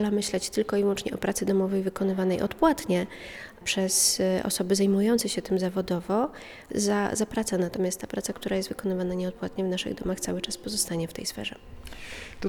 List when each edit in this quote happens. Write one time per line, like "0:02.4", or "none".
none